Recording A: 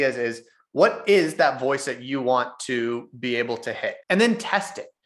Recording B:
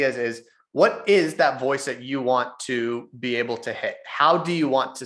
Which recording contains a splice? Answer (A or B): A